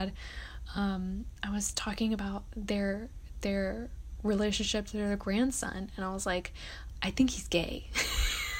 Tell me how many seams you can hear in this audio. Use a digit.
1